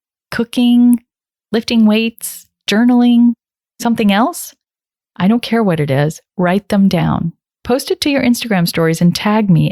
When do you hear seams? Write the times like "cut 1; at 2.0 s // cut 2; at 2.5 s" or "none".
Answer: cut 1; at 7.6 s